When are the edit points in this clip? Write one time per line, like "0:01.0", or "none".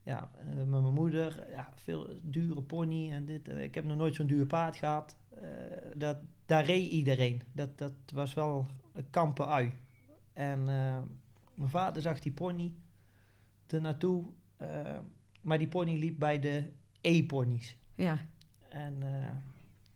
0:05.9
0:07.7

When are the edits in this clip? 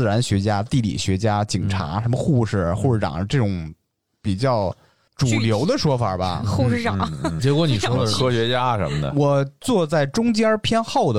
0:07.4

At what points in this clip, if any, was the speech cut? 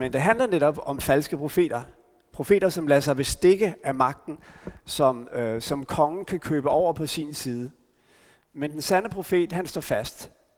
none

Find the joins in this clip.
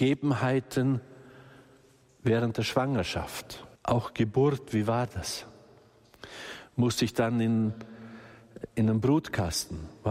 0:03.7

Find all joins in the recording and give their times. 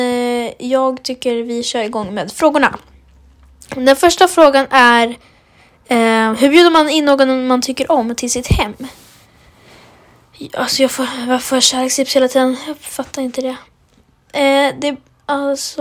none

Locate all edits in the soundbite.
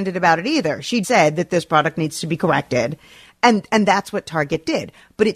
0:01.0

